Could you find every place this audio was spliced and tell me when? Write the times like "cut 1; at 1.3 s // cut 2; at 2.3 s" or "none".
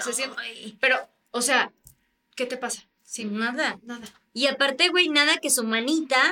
none